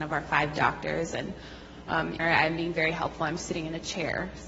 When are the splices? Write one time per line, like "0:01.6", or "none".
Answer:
0:02.2